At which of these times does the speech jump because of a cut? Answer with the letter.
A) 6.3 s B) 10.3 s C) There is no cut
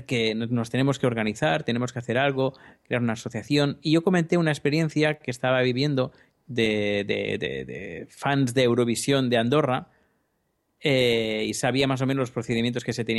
A